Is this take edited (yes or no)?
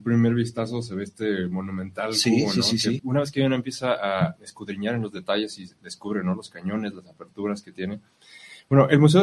yes